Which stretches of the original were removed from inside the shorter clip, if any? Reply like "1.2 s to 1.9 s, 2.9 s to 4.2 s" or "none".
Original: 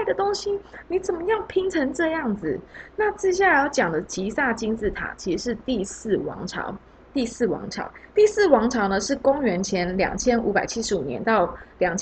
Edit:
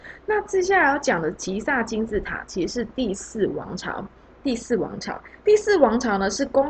none